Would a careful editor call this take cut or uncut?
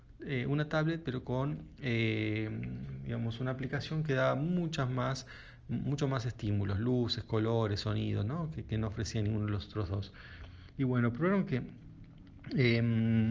uncut